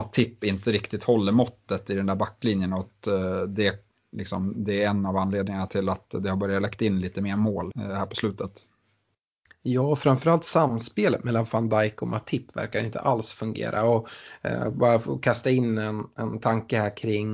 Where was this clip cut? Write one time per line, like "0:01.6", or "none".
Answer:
0:07.7